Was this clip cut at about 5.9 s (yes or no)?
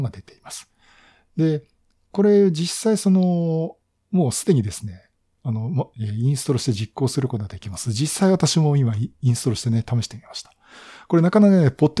yes